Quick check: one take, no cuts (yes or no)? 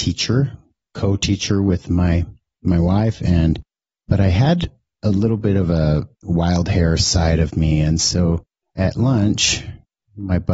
no